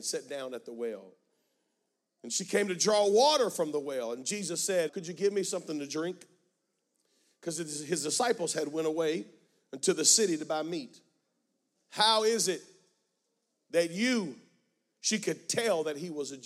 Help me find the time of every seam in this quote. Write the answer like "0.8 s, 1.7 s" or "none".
4.9 s, 11.8 s